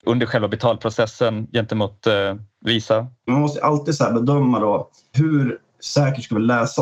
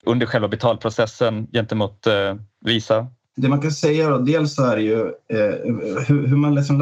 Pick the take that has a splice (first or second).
first